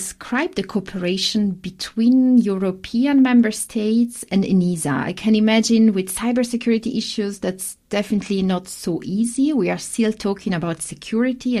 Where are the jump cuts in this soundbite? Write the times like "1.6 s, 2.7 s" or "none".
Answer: none